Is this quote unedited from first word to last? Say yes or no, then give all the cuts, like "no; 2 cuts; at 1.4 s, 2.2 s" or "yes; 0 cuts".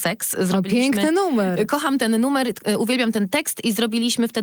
yes; 0 cuts